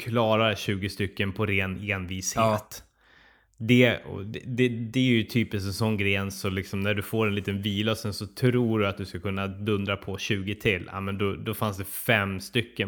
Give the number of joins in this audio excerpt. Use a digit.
0